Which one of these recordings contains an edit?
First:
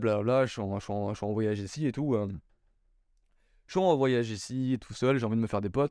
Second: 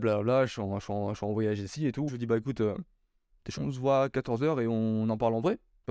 second; 2 cuts; at 2.1 s, 3.6 s

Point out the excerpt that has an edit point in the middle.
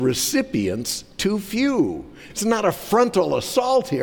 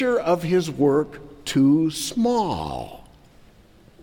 first; 1 cut; at 2.3 s

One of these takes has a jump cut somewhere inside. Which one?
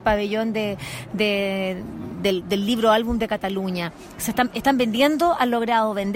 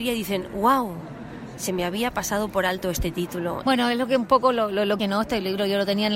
second; 2 cuts; at 3.6 s, 5.0 s

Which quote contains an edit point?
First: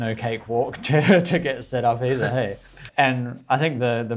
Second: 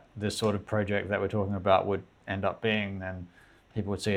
first; 1 cut; at 2.9 s

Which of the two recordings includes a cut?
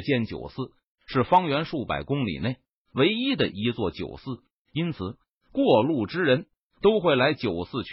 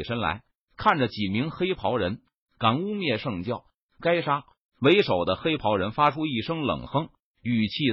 second; 1 cut; at 2.4 s

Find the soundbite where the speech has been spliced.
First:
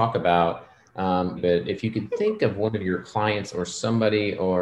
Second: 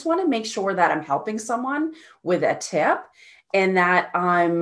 first; 1 cut; at 1.4 s

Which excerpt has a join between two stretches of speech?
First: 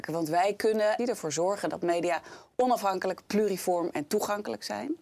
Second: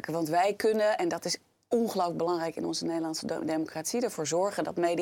first; 1 cut; at 1.0 s

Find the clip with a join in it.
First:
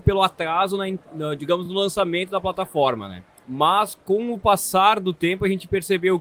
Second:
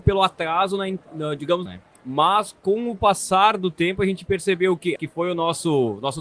second; 2 cuts; at 1.7 s, 5.0 s

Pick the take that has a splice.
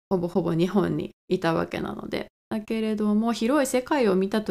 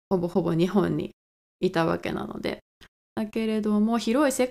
first; 2 cuts; at 1.2 s, 2.4 s

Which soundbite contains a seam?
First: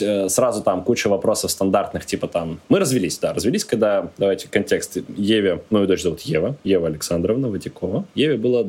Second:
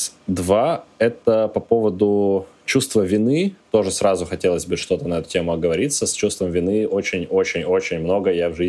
first; 2 cuts; at 2.6 s, 5.7 s

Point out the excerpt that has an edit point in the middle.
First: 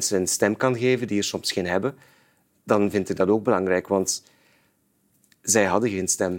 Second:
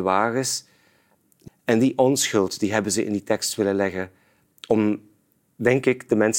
second; 1 cut; at 1.5 s

